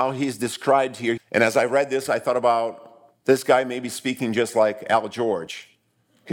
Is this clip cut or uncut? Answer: cut